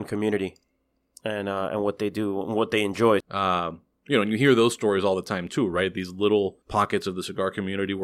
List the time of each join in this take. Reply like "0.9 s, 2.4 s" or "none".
3.2 s, 6.6 s